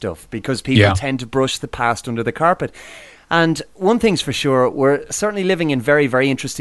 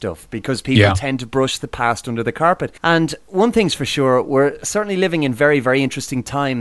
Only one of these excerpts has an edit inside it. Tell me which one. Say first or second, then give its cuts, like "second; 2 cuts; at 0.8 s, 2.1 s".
second; 1 cut; at 2.8 s